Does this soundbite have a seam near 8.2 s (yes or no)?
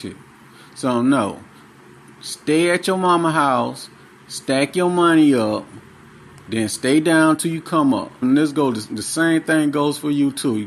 yes